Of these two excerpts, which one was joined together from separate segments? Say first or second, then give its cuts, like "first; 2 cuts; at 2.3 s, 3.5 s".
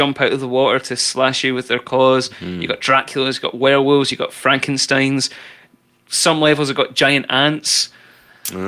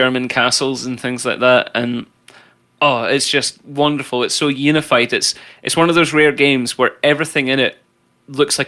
first; 1 cut; at 4.1 s